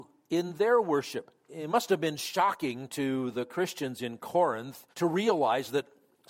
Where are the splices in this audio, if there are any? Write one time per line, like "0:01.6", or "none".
0:01.5
0:04.9